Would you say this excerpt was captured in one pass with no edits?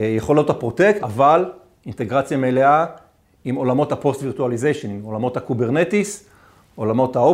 no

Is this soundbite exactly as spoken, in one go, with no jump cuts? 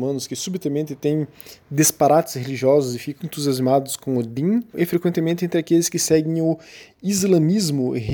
no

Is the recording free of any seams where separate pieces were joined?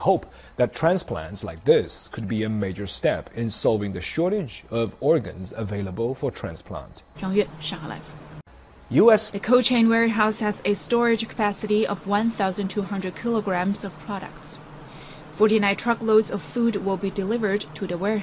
no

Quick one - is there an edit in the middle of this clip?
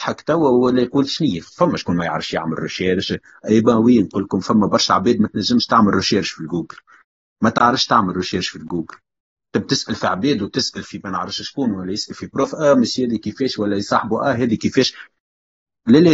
no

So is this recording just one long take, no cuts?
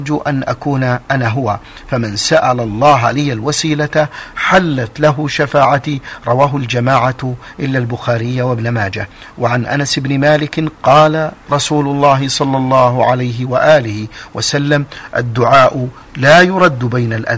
no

